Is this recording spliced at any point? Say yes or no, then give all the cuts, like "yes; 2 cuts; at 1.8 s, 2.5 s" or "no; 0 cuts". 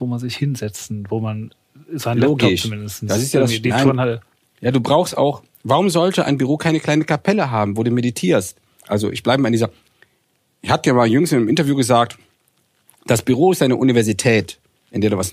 no; 0 cuts